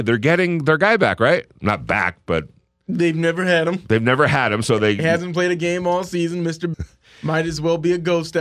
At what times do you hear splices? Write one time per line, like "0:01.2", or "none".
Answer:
0:06.7